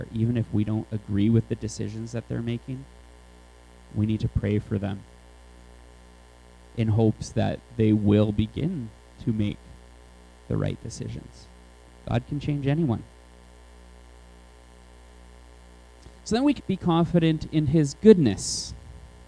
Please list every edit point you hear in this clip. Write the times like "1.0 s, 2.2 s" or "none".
16.6 s